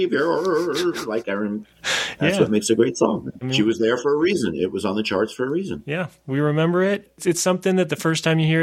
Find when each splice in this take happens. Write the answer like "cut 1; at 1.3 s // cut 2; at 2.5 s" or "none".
cut 1; at 3.4 s